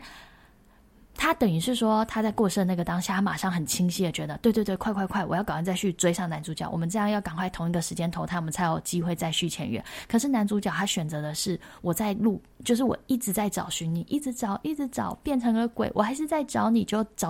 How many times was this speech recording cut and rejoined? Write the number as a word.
zero